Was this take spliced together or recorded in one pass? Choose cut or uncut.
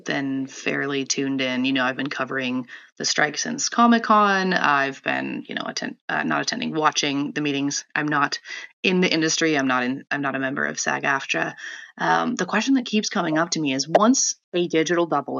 cut